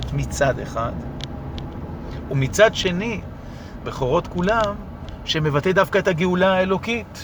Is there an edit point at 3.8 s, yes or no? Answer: yes